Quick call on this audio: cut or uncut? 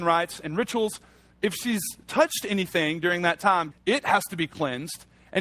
cut